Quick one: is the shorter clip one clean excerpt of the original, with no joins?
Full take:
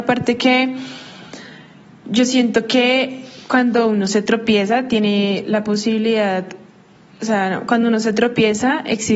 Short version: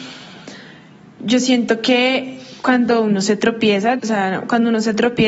no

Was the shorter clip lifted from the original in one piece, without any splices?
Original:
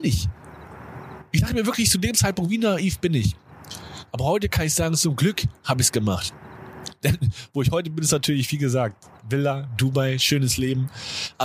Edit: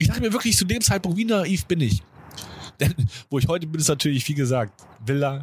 no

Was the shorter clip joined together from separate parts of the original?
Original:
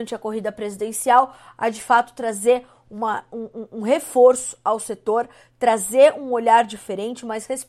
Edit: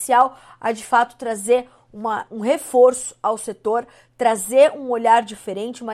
yes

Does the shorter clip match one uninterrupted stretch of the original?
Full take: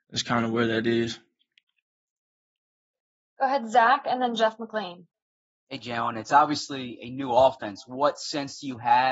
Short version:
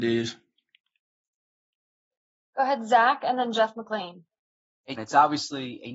no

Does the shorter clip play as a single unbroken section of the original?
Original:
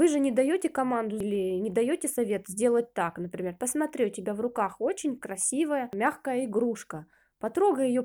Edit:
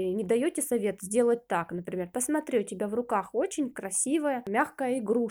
yes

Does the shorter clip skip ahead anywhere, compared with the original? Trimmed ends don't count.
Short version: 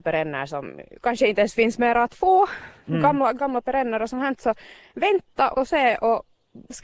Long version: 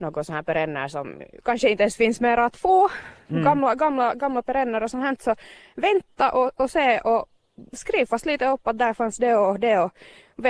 yes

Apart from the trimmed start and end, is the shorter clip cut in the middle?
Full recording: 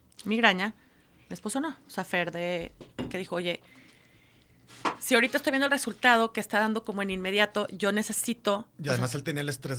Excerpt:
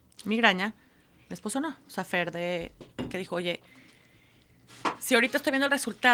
no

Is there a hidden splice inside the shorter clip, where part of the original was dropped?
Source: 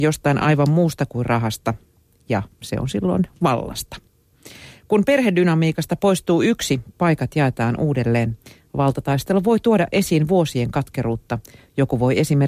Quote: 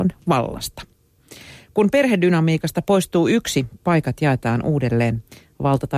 no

